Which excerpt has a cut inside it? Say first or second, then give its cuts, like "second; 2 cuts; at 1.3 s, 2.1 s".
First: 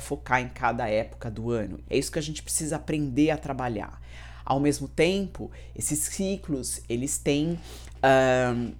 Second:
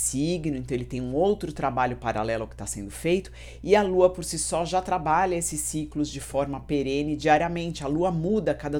first; 1 cut; at 1.8 s